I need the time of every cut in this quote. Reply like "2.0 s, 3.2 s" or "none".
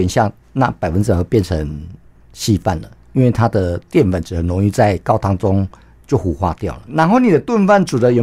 6.9 s